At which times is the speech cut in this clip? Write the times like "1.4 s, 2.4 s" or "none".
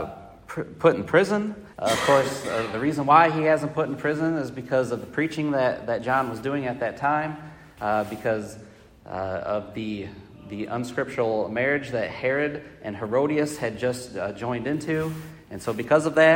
1.7 s